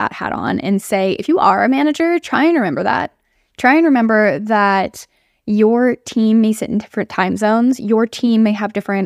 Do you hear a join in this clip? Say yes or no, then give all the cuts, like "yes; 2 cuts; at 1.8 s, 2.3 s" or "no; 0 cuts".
no; 0 cuts